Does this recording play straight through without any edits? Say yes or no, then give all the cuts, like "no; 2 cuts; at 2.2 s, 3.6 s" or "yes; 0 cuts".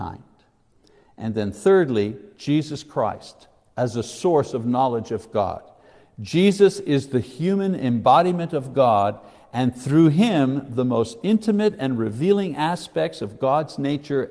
yes; 0 cuts